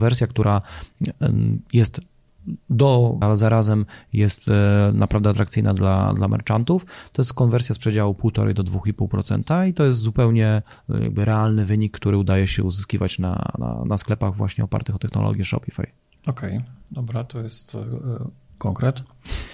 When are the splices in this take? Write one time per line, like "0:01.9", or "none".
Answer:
0:03.2